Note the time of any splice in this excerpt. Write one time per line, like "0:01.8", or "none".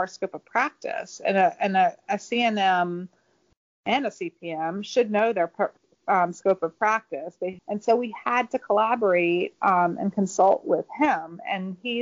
0:07.6